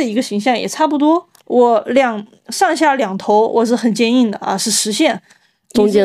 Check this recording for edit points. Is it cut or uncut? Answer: uncut